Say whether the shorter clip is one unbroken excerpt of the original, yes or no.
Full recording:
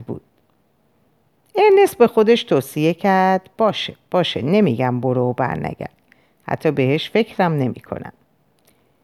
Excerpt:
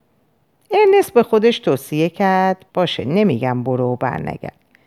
no